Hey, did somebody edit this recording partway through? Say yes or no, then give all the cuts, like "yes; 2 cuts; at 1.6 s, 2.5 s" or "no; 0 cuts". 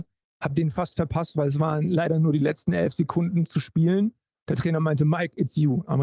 no; 0 cuts